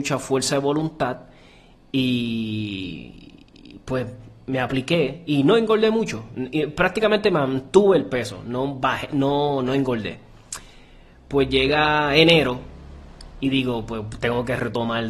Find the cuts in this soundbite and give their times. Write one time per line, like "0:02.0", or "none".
none